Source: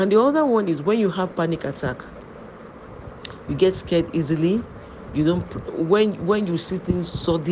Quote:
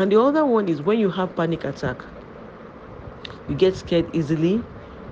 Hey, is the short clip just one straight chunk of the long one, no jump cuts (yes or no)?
yes